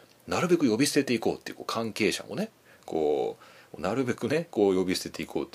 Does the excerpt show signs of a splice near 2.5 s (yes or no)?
no